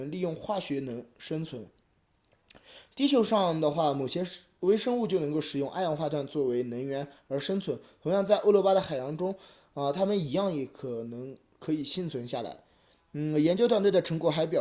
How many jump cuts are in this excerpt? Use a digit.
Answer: 0